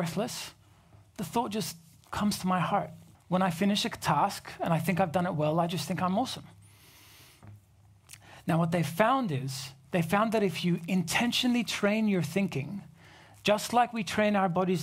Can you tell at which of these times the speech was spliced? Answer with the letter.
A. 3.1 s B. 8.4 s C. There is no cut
A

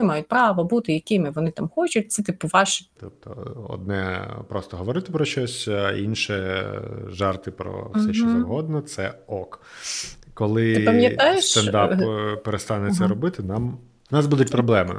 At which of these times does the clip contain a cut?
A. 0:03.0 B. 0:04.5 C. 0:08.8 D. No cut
A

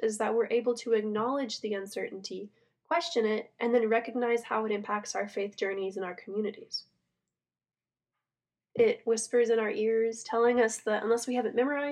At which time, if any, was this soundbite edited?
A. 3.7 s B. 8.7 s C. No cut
B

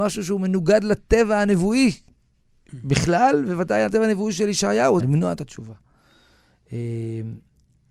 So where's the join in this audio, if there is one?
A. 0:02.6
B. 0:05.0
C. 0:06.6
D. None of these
B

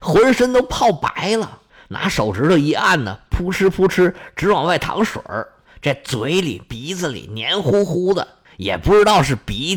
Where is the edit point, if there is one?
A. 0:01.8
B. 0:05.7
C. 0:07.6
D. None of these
D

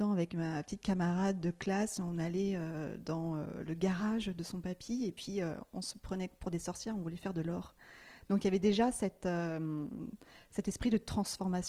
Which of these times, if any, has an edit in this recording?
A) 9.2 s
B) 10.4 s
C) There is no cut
C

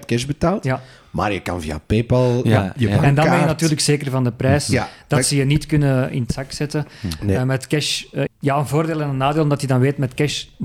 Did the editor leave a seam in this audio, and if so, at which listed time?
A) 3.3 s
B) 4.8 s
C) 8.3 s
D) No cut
C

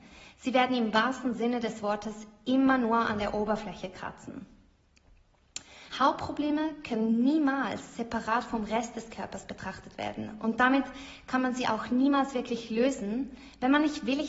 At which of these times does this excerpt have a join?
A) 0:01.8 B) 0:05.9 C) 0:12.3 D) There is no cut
B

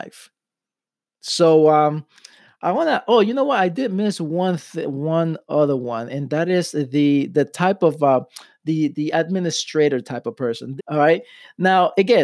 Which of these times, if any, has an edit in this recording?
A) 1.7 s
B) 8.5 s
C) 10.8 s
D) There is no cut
C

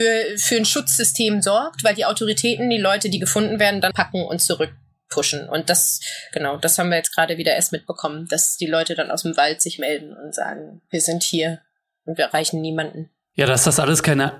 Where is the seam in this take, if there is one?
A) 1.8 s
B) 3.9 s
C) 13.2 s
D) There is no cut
B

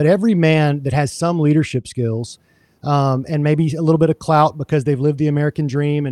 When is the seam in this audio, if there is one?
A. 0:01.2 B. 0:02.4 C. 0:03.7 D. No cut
D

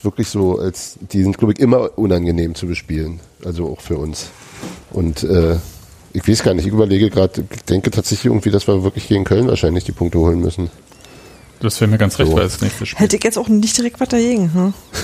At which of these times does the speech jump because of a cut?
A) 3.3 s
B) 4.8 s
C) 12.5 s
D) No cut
C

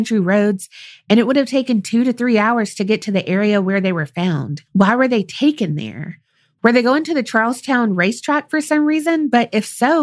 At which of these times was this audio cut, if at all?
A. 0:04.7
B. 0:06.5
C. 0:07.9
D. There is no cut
A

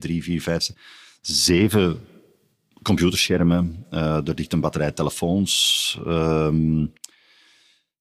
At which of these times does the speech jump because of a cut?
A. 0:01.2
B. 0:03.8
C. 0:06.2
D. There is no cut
D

